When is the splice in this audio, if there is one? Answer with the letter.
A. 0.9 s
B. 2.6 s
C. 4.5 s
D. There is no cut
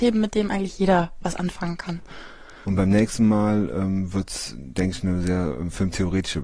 B